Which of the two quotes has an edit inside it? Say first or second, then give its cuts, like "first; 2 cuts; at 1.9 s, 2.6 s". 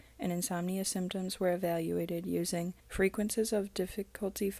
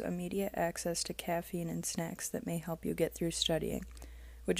first; 1 cut; at 2.8 s